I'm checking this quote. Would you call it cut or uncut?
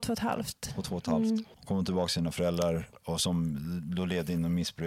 cut